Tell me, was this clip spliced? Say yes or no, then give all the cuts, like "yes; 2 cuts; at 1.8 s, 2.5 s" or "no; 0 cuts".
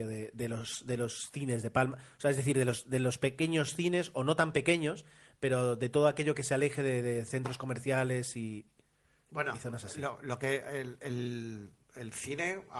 no; 0 cuts